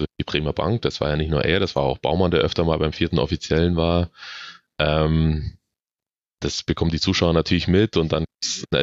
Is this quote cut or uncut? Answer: uncut